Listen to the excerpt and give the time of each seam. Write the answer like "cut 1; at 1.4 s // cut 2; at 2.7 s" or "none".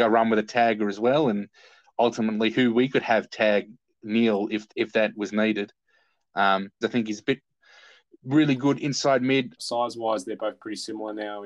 cut 1; at 6.8 s // cut 2; at 9.6 s